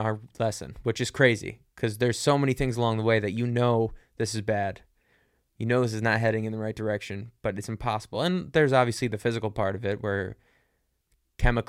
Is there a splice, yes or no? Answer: no